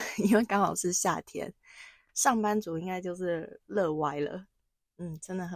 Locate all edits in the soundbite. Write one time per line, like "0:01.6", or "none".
0:02.1